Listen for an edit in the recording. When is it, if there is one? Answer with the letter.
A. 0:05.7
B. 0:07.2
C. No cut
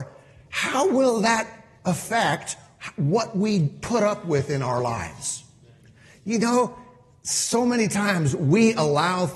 C